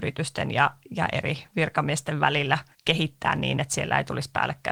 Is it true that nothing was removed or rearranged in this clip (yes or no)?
no